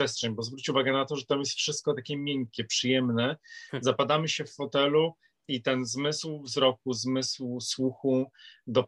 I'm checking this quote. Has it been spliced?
yes; 1 cut; at 5.3 s

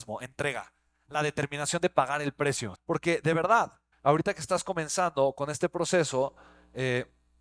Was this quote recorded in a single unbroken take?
no; 2 cuts; at 2.7 s, 3.9 s

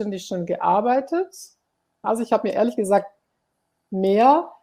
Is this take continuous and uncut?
no; 1 cut; at 2.0 s

